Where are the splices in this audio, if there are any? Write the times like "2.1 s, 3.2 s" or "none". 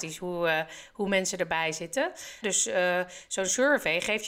2.4 s